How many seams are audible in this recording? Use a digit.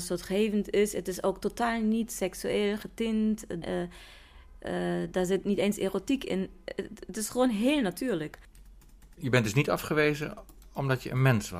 1